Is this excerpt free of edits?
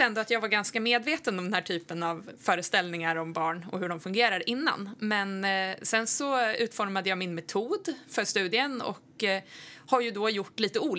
yes; 0 cuts

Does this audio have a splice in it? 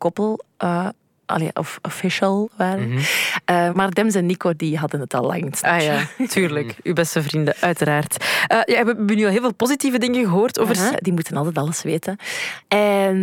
yes; 2 cuts; at 3.7 s, 10.9 s

